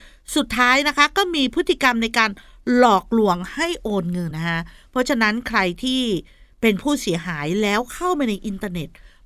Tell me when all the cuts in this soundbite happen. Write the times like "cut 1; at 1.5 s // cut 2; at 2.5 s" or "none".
cut 1; at 4.3 s